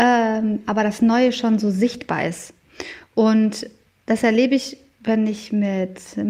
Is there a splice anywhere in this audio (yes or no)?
no